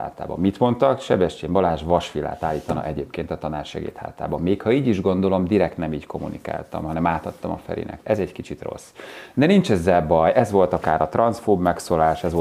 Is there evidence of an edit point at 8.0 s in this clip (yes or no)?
yes